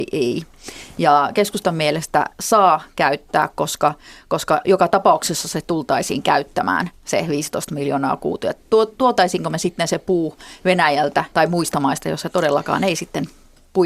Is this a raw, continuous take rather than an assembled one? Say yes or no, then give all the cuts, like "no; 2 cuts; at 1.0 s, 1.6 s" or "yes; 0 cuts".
no; 1 cut; at 11.3 s